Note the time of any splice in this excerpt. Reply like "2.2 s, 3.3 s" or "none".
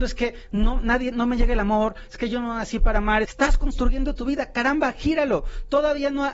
3.2 s